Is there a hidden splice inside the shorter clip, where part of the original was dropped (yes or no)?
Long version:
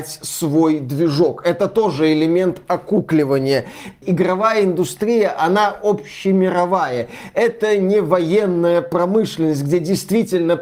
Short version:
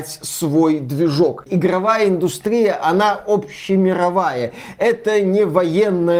yes